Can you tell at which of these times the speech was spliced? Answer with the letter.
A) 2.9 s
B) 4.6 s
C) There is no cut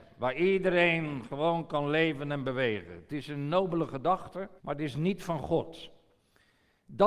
B